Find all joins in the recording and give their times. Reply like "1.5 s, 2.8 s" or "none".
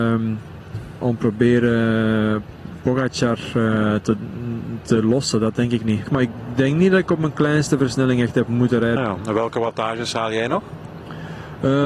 6.1 s, 9.0 s